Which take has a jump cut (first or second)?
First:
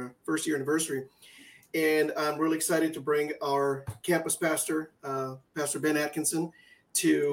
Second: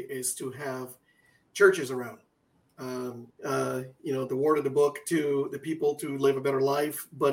second